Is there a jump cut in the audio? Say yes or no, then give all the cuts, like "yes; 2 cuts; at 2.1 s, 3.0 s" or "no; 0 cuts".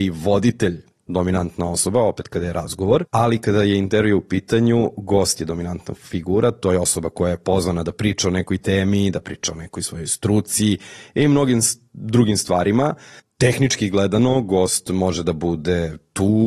yes; 1 cut; at 3.0 s